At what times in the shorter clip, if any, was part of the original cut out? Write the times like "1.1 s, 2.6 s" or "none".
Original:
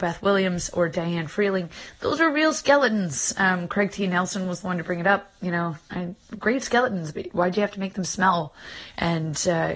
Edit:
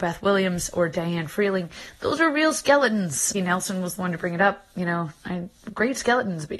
3.3 s